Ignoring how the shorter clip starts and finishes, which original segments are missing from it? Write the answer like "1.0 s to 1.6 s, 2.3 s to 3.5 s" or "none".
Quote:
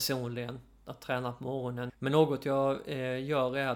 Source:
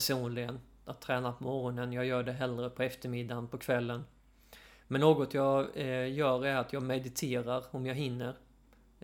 1.9 s to 4.8 s